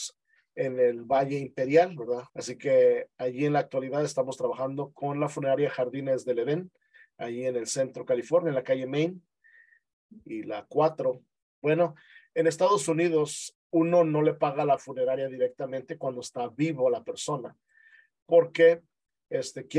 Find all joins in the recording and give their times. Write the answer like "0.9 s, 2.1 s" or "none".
2.3 s, 11.4 s, 13.5 s